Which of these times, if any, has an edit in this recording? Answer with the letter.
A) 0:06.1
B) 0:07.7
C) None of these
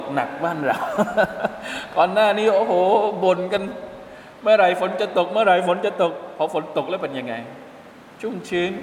C